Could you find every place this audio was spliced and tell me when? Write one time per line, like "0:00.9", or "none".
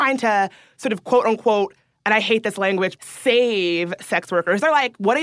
0:03.0